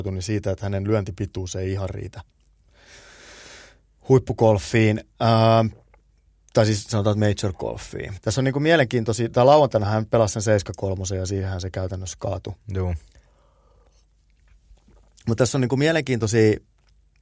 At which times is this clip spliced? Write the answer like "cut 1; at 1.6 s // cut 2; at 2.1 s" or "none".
cut 1; at 8.2 s